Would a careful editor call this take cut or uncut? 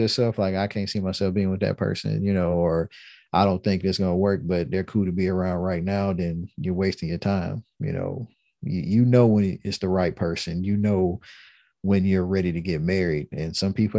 uncut